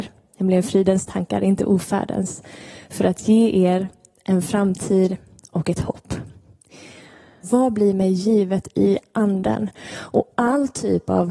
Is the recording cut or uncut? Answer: cut